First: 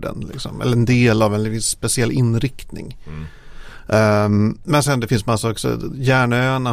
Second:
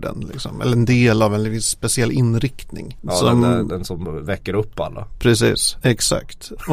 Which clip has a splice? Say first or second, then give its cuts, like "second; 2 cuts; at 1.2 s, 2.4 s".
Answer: second; 2 cuts; at 3.0 s, 5.8 s